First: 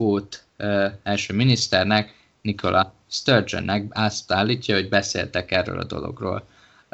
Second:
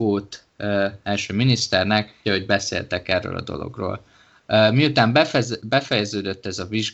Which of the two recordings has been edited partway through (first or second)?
second